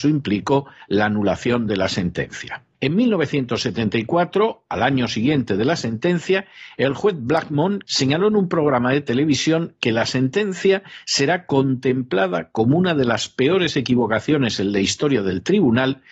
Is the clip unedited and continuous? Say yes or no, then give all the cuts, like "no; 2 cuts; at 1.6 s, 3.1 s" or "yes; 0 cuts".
no; 2 cuts; at 2.7 s, 7.9 s